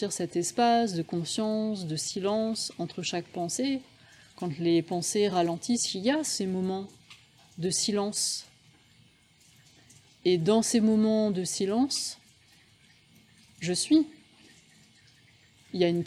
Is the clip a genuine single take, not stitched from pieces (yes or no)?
yes